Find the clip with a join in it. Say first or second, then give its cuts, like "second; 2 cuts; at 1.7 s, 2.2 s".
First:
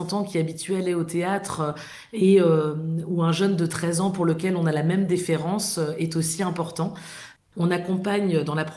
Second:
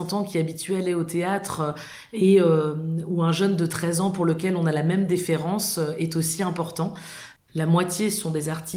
second; 1 cut; at 7.5 s